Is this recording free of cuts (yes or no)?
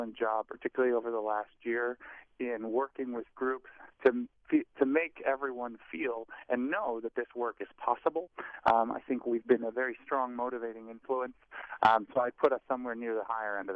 yes